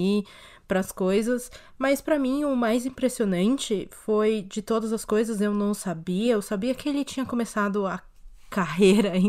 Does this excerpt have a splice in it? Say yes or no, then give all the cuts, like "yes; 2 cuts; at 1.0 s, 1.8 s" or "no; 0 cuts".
no; 0 cuts